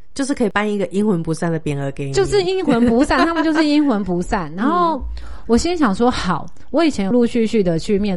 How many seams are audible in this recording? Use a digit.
1